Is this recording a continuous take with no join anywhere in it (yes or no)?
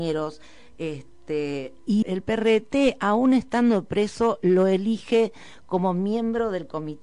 no